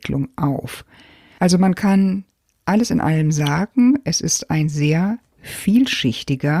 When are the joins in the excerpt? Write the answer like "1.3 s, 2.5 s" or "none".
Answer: none